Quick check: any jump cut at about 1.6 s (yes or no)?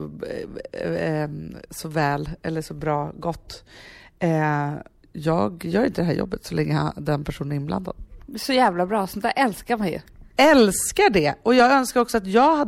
no